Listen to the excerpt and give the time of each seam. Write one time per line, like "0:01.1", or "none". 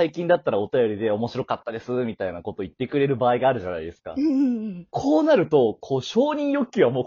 0:04.9